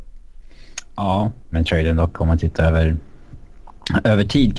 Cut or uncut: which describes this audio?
cut